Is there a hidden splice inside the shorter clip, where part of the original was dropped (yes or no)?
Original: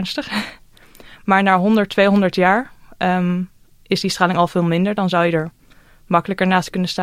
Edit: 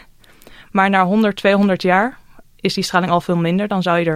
yes